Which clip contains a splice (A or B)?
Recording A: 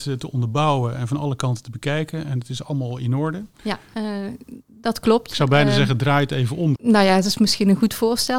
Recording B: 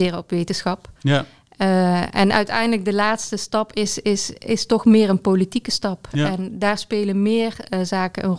A